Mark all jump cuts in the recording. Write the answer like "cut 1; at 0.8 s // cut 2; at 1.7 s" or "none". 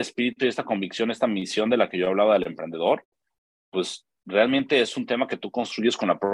none